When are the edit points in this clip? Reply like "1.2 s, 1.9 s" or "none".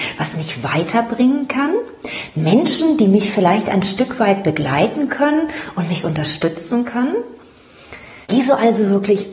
8.2 s